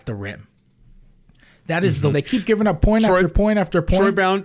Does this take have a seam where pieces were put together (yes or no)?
yes